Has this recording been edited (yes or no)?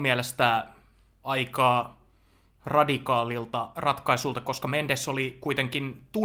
no